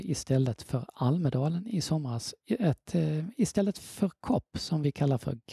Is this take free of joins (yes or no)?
yes